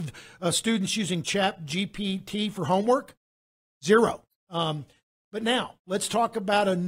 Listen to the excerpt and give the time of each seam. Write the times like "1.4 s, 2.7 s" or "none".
4.3 s